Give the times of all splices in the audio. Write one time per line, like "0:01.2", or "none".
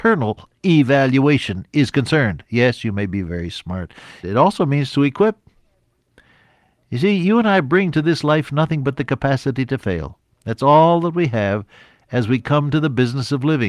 0:04.2